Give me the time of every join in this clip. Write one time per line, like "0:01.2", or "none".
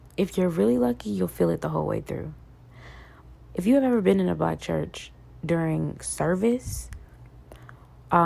0:03.4

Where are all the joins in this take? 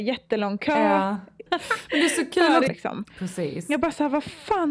0:01.5
0:02.7

